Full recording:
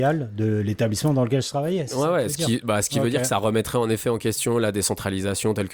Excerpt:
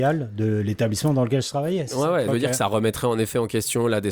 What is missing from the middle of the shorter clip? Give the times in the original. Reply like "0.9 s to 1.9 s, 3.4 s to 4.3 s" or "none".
2.3 s to 3.0 s

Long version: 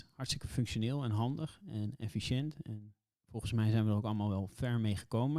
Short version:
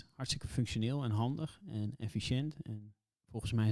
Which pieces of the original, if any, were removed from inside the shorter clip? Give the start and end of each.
none

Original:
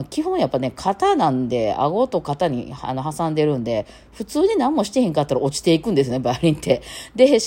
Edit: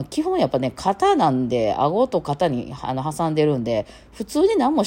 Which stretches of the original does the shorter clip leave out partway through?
none

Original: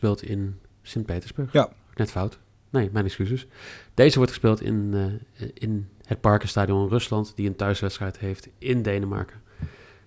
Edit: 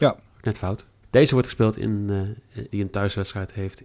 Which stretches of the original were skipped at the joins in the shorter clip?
2.6 s to 3.9 s, 5.5 s to 7.3 s

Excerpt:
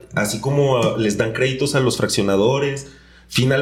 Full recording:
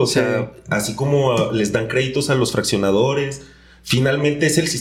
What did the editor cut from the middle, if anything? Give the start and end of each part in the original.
none

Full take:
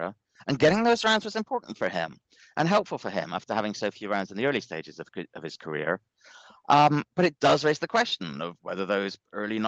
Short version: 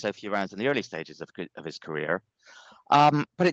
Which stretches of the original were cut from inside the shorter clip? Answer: none

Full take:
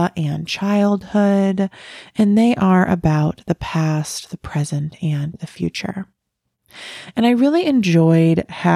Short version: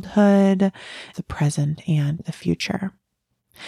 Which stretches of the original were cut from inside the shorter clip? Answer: 2.1 s to 4.3 s

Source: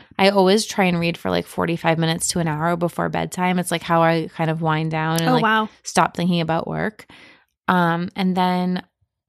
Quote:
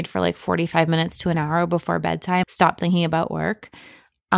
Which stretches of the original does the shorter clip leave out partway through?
3.5 s to 5.8 s

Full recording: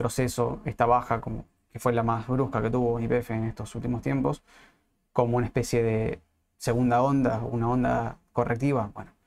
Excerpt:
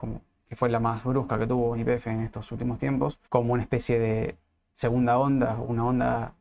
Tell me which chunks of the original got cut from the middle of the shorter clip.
4.5 s to 5.1 s

